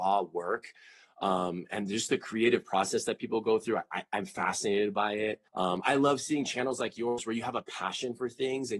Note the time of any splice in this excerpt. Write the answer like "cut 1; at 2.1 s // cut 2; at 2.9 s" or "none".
cut 1; at 5.5 s